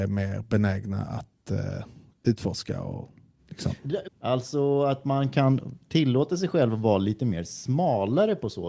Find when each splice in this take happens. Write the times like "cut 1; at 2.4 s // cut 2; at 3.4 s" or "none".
cut 1; at 4.1 s

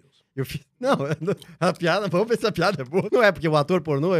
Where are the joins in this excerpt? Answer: cut 1; at 3.1 s

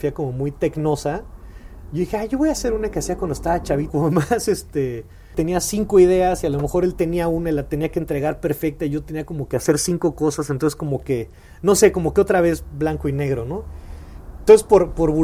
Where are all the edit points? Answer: cut 1; at 3.9 s

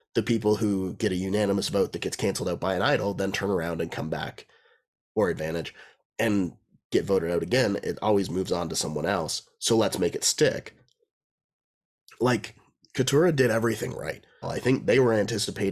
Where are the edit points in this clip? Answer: cut 1; at 14.4 s

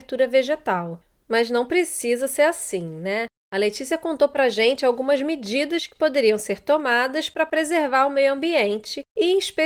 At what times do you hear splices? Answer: none

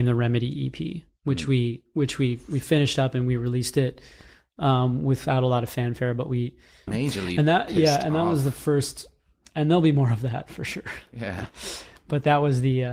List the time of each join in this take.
cut 1; at 6.9 s

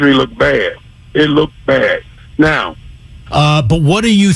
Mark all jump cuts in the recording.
cut 1; at 3.3 s

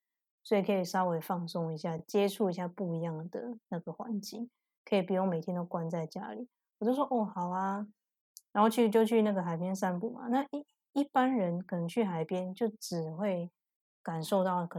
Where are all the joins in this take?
none

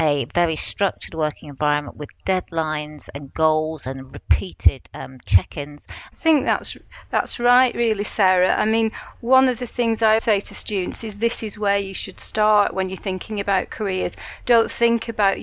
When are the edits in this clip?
cut 1; at 6.1 s // cut 2; at 10.2 s

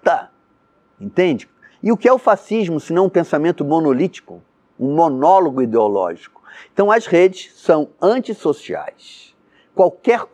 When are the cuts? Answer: cut 1; at 1.7 s

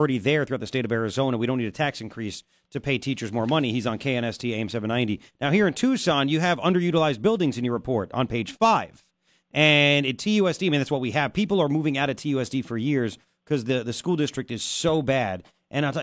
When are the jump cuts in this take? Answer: none

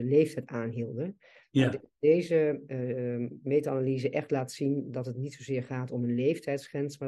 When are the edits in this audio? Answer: none

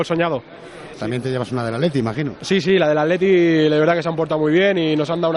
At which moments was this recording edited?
cut 1; at 0.9 s

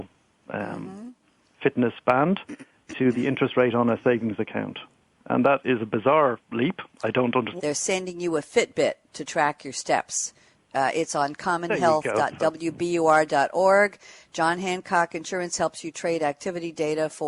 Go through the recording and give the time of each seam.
cut 1; at 7.6 s

